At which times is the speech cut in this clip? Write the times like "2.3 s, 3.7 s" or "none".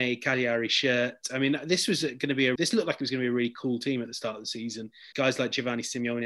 2.6 s, 5.1 s